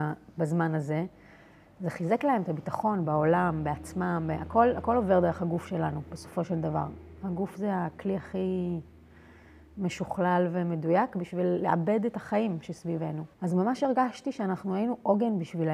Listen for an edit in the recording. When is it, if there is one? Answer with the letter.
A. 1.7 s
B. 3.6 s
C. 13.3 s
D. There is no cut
C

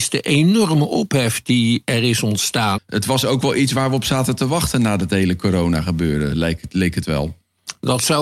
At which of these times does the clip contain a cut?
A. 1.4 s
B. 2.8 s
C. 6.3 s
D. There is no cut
B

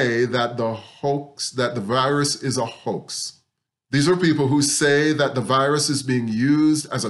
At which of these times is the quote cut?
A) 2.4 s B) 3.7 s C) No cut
B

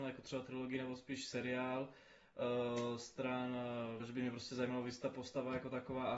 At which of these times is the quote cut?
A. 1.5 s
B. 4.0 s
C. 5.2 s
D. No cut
B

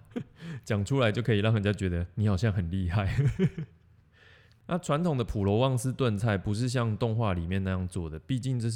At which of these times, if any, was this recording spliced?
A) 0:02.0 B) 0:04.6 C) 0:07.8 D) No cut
D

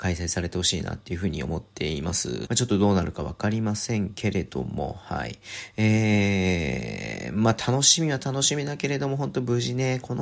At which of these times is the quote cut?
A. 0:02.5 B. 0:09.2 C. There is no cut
A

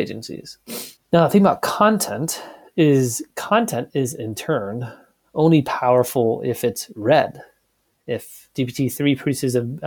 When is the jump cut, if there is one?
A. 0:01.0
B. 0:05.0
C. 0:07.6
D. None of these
A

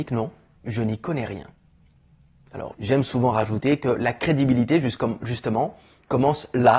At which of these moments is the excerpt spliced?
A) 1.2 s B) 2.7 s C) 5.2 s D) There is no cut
B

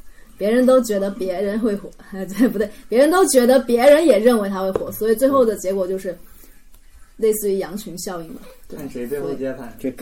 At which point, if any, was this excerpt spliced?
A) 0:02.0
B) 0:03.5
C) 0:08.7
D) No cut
D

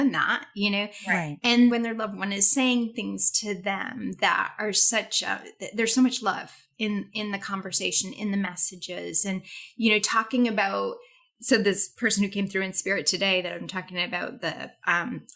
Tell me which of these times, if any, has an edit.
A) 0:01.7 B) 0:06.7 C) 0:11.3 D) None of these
A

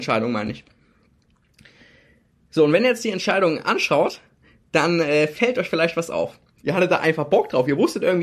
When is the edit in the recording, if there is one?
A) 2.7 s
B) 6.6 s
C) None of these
B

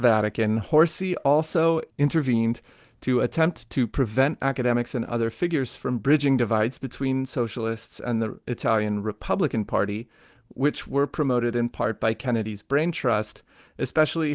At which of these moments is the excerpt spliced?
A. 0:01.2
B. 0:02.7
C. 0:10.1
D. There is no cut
D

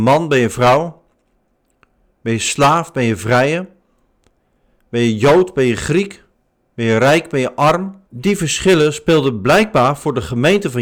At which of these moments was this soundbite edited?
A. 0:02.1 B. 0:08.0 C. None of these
B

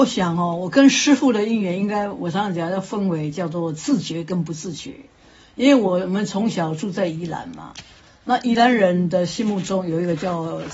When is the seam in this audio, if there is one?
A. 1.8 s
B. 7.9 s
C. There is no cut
C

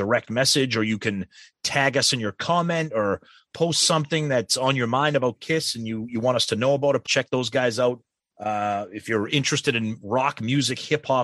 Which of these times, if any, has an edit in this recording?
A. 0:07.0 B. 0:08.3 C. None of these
A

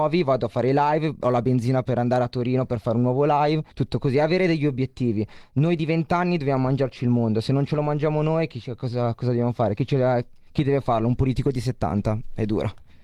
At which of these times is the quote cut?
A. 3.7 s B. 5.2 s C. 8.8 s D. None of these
A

